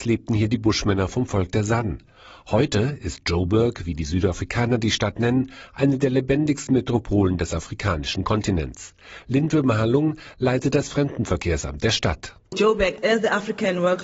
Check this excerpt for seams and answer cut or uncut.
uncut